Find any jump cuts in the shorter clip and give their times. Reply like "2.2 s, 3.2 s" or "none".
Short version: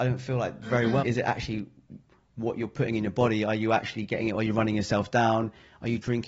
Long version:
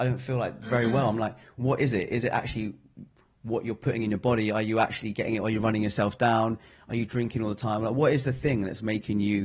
1.0 s

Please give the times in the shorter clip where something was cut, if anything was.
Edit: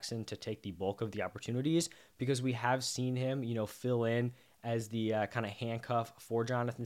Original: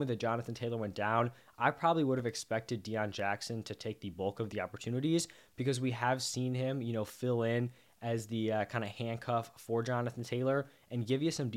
none

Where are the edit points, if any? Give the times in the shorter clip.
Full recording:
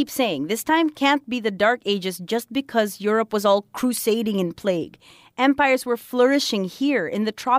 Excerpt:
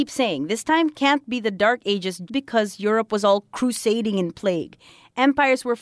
2.3 s

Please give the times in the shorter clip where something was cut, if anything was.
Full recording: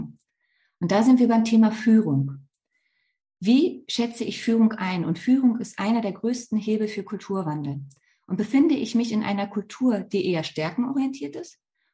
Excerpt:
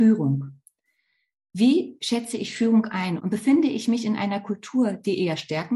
3.2 s

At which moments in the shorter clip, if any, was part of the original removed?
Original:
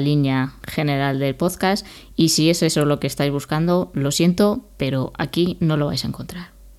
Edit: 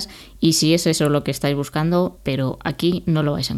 2.2 s

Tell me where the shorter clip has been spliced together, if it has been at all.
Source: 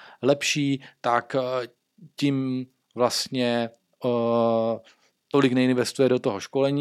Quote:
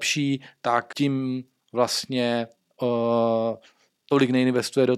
0.9 s

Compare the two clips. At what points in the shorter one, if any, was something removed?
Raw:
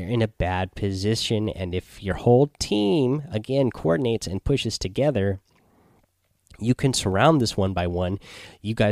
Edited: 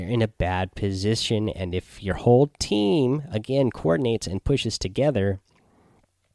none

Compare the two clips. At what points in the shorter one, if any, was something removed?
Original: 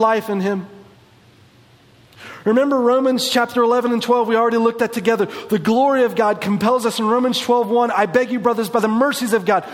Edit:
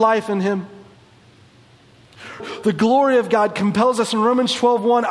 2.4 s

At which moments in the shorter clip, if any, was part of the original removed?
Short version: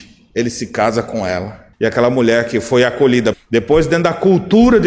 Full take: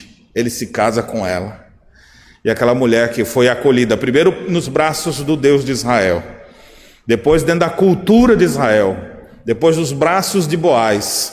1.7 s, 3.3 s

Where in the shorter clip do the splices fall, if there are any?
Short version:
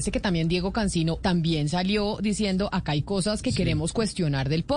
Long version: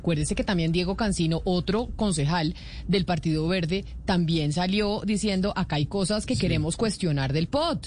1.2 s

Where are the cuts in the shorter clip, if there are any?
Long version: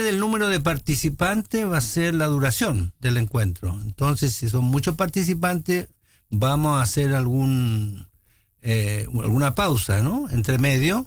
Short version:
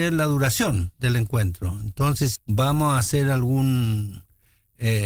2.4 s

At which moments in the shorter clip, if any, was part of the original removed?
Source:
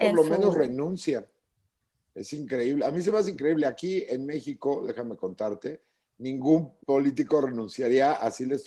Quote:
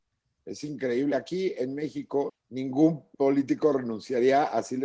1.1 s, 2.3 s

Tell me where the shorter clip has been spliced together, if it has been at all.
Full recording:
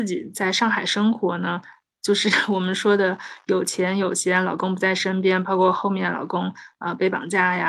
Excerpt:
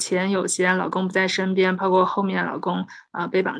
none

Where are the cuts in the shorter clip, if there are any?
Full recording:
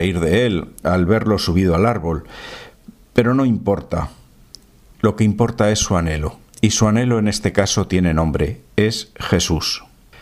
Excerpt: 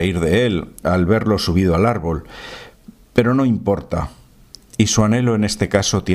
4.7 s

